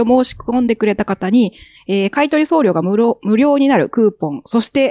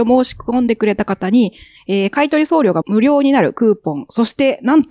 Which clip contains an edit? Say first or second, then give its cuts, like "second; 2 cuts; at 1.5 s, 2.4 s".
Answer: second; 1 cut; at 2.8 s